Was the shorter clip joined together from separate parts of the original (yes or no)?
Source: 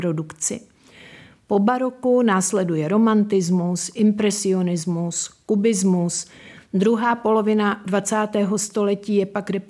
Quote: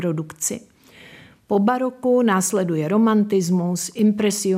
no